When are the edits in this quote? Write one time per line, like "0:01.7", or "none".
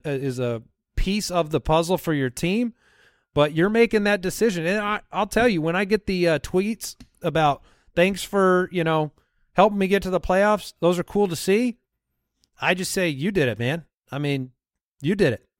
none